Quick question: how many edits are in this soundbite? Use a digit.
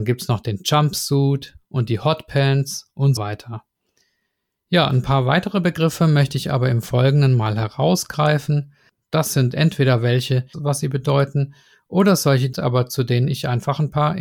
3